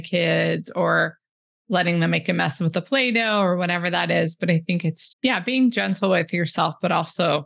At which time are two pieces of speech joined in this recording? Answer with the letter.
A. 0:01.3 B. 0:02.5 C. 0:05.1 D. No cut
C